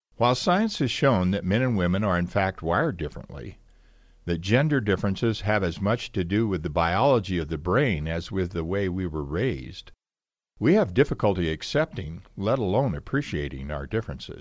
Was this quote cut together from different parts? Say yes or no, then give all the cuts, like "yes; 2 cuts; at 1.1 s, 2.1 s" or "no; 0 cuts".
no; 0 cuts